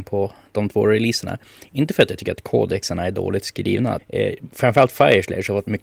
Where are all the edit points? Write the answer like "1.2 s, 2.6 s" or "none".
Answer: 4.0 s